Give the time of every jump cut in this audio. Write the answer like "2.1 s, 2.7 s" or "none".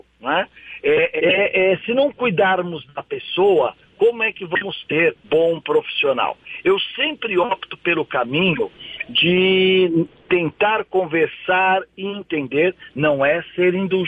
1.2 s, 5.2 s